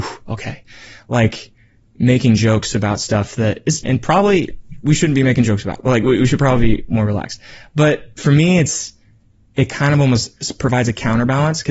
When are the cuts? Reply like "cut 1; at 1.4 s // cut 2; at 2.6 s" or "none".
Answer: cut 1; at 3.8 s